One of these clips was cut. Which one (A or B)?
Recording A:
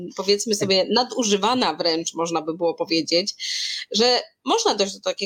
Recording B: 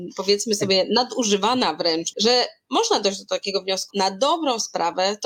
B